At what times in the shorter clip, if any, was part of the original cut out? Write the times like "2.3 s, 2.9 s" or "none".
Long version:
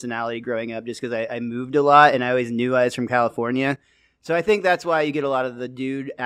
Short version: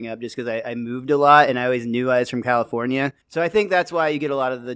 3.2 s